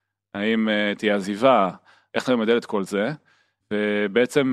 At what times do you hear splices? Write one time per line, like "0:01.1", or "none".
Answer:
0:02.1